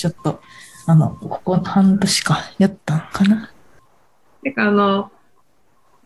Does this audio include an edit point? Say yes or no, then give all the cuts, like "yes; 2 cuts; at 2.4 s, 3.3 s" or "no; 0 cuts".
no; 0 cuts